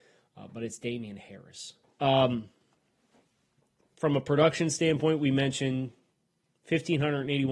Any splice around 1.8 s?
yes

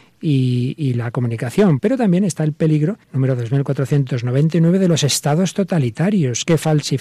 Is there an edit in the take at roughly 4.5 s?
no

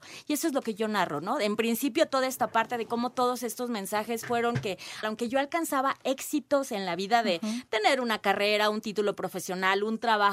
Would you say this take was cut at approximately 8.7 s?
no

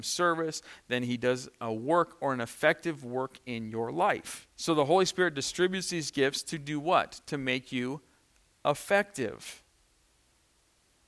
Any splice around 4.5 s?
yes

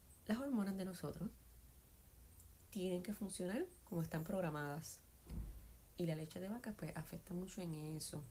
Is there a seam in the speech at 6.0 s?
yes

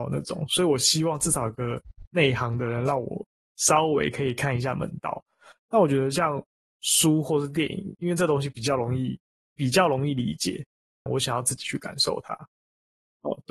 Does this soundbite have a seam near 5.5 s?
no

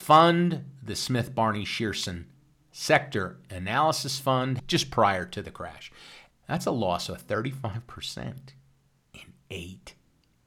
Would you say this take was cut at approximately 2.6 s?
no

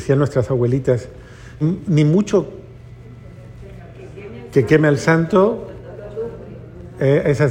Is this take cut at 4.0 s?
no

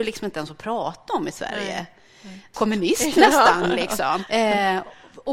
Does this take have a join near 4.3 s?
yes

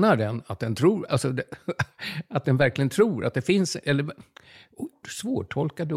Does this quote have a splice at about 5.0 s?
yes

